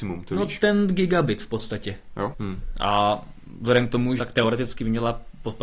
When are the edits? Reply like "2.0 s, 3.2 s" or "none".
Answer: 2.3 s, 4.2 s